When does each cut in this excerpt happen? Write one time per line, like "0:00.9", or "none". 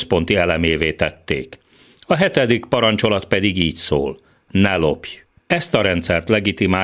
none